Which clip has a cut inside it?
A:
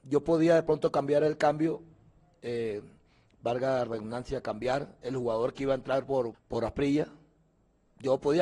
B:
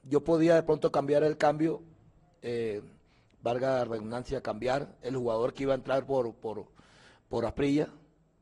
A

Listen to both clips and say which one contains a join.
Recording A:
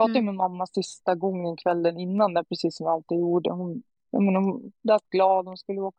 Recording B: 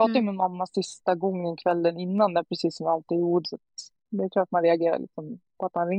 B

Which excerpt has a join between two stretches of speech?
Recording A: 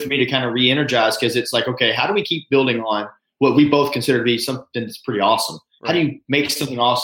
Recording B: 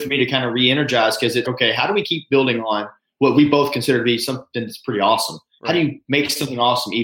B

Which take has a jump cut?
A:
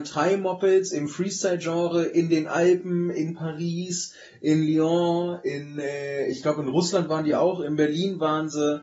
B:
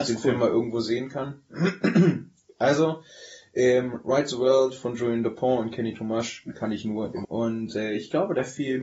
B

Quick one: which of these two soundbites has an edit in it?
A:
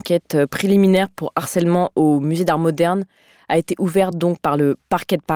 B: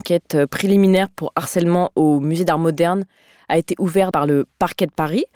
B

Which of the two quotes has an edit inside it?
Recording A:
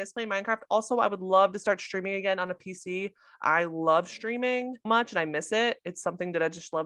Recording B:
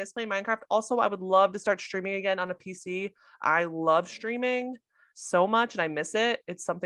A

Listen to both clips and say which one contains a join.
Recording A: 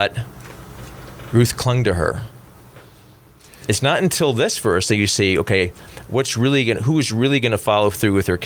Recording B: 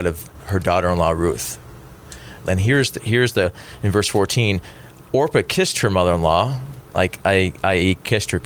B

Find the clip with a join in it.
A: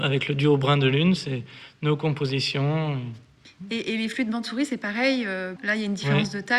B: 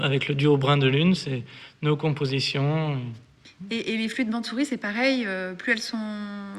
A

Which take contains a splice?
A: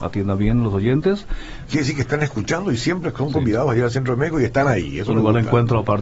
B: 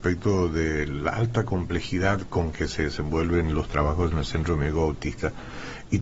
A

